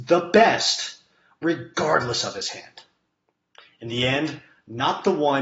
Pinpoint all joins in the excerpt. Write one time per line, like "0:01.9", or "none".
none